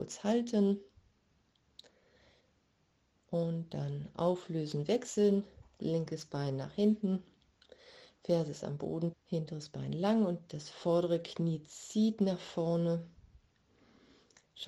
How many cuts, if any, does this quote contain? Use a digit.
1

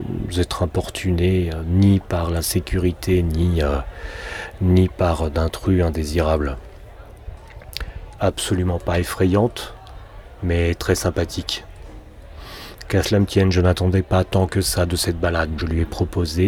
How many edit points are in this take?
2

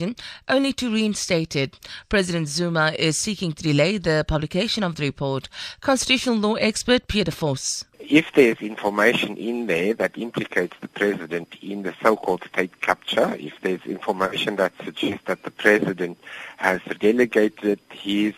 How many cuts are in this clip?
2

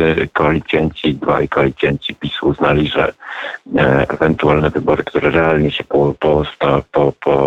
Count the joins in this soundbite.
0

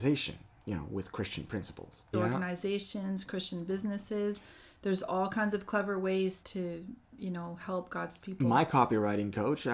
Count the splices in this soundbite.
2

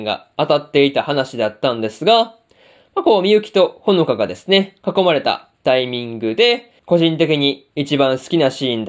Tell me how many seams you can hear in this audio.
1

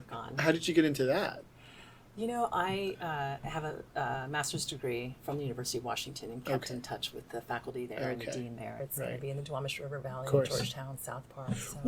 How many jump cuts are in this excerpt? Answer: 2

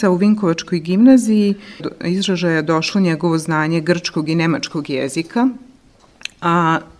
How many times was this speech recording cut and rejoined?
1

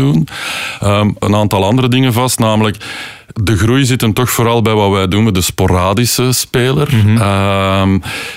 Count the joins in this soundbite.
2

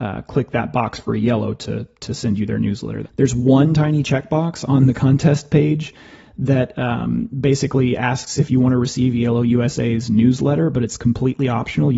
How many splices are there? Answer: 1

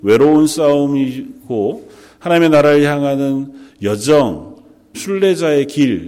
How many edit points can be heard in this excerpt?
1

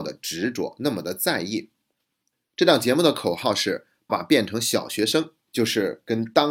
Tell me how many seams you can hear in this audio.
2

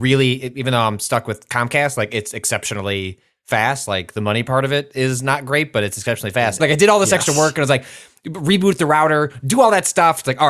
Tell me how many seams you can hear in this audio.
1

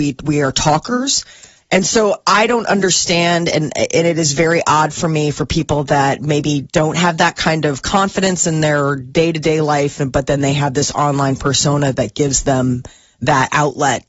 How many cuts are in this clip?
0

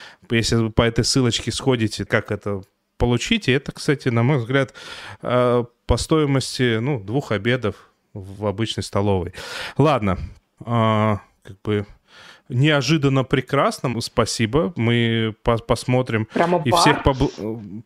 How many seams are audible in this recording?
3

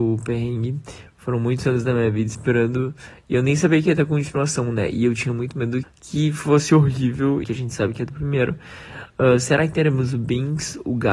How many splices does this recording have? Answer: 2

